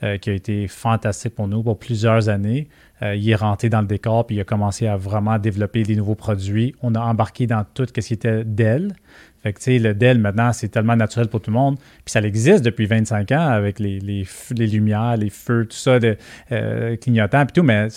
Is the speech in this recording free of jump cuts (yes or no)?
yes